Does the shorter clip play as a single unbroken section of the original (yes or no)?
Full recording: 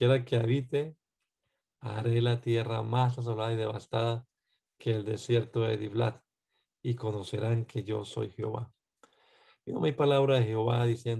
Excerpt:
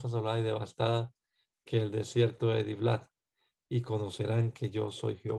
yes